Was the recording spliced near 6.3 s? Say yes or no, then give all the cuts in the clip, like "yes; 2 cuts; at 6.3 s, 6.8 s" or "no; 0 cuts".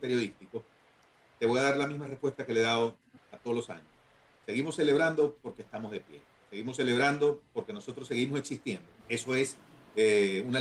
no; 1 cut; at 9.0 s